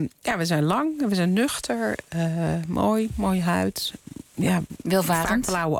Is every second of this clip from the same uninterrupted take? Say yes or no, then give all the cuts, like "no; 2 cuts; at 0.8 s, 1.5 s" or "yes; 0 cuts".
yes; 0 cuts